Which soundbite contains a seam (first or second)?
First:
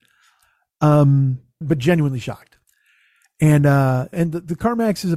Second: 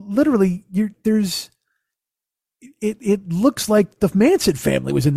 first